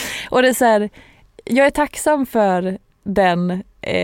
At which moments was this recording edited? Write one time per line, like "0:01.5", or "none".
none